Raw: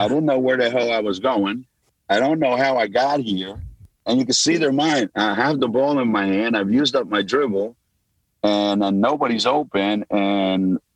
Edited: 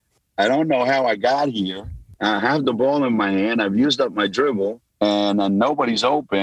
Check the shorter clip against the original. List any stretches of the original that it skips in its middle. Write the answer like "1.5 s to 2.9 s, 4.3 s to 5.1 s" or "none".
3.9 s to 5.1 s, 7.8 s to 8.3 s